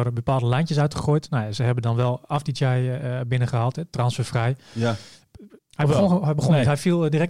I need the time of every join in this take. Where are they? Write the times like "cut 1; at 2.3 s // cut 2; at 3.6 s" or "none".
cut 1; at 5.6 s